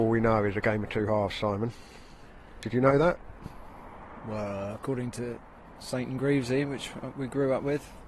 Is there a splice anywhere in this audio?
no; 0 cuts

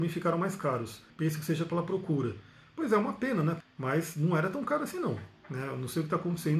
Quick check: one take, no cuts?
no; 2 cuts; at 1.1 s, 3.6 s

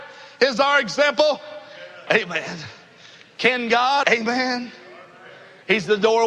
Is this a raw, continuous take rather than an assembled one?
no; 2 cuts; at 2.1 s, 4.0 s

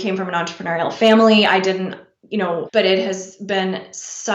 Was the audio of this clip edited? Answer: yes; 1 cut; at 2.7 s

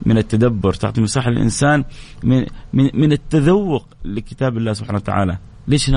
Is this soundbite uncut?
yes; 0 cuts

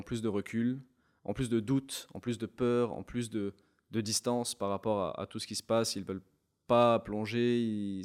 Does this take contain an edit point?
no; 0 cuts

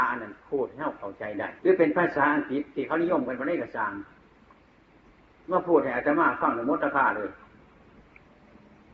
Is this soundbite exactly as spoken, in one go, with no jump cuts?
no; 1 cut; at 1.6 s

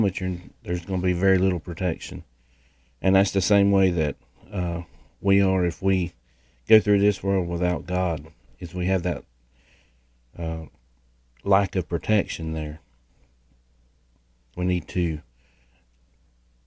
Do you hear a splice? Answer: yes; 1 cut; at 14.5 s

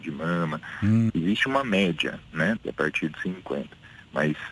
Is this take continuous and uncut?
no; 2 cuts; at 1.1 s, 2.6 s

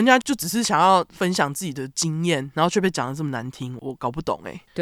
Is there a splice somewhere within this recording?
no; 0 cuts

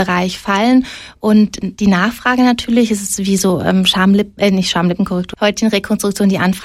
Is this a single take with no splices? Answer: no; 1 cut; at 5.3 s

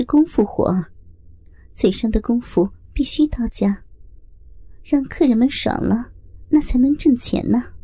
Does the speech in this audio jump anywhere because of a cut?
no; 0 cuts

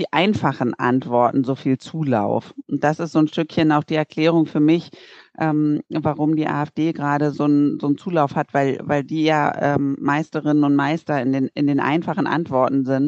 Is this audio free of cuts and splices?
yes; 0 cuts

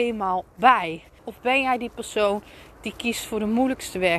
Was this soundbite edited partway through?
yes; 1 cut; at 1.2 s

